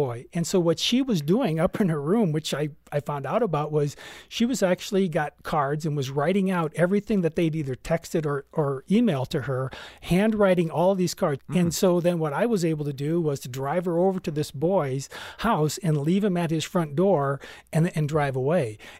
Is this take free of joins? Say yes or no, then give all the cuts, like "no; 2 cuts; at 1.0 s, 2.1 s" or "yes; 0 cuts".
no; 1 cut; at 11.4 s